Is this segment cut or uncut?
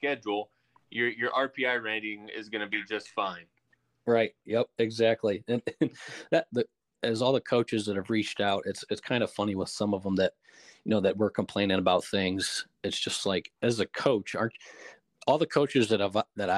cut